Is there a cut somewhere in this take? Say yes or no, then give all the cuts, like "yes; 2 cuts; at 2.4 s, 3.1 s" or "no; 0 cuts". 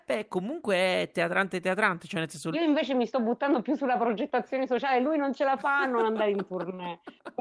yes; 1 cut; at 2.5 s